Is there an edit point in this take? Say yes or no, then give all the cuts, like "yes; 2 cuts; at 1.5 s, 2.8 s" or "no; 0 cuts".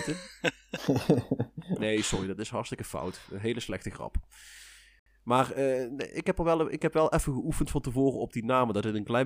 no; 0 cuts